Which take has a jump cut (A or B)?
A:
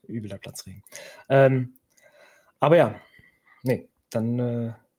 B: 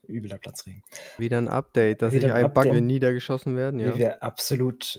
B